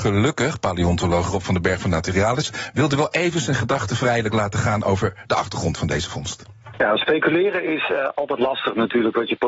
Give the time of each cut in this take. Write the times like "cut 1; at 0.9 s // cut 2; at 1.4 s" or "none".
none